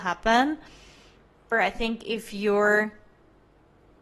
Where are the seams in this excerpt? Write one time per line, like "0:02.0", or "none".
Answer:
0:01.5